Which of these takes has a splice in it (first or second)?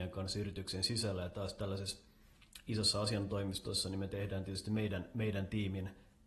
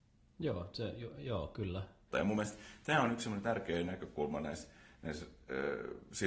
second